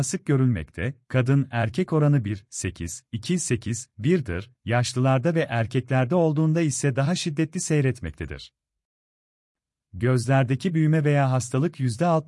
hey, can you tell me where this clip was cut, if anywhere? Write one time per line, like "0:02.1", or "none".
none